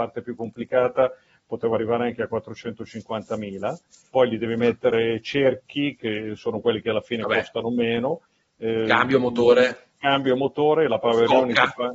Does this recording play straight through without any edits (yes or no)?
no